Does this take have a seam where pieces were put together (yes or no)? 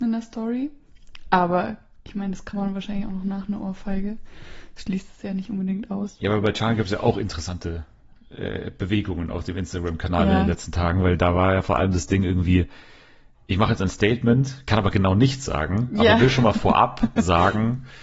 no